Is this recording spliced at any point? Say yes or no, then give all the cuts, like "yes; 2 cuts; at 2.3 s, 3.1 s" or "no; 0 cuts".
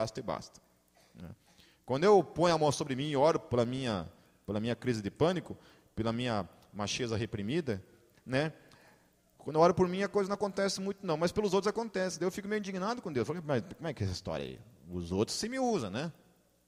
no; 0 cuts